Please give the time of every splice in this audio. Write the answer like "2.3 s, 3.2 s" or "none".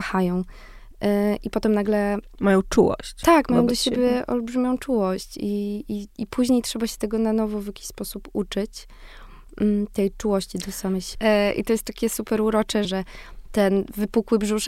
11.1 s, 12.8 s